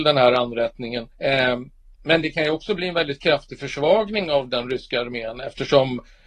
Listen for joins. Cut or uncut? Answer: cut